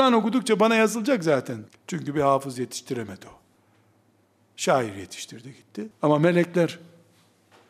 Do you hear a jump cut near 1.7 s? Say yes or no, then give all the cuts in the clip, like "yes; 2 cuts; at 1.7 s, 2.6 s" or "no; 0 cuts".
yes; 2 cuts; at 1.7 s, 5.9 s